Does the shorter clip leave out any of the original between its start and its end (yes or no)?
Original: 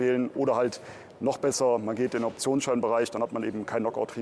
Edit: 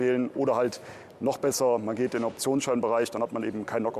no